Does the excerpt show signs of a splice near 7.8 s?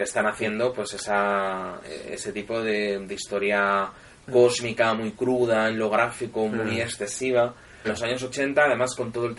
yes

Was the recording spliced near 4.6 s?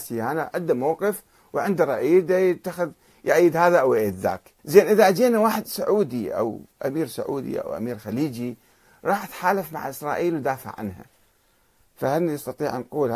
yes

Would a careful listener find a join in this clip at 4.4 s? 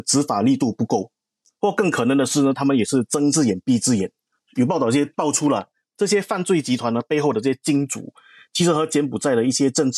no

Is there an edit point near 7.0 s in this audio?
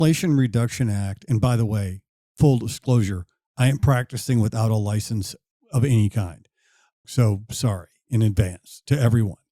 yes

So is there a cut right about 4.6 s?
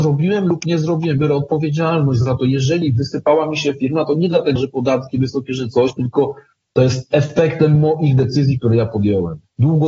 yes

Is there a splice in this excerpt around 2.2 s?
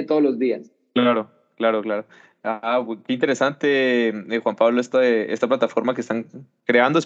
no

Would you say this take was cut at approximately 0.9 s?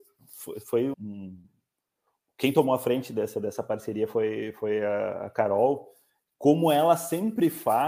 yes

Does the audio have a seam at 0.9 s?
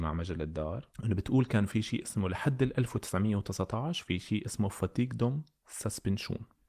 yes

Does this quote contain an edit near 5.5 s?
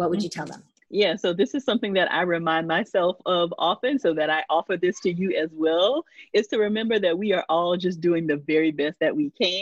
no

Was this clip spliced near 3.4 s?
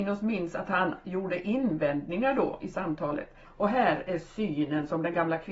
yes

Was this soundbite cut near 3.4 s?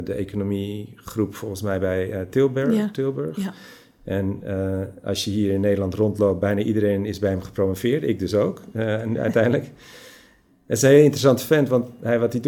no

